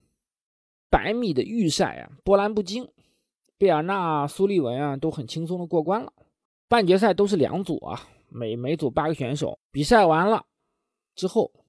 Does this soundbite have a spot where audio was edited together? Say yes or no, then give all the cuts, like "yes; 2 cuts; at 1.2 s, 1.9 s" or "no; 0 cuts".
yes; 3 cuts; at 3.5 s, 6.5 s, 9.6 s